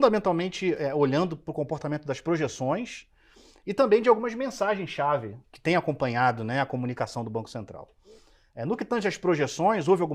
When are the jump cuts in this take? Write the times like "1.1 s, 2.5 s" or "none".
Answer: 5.4 s